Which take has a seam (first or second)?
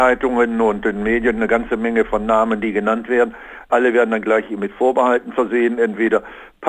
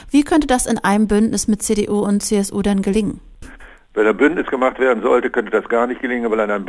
second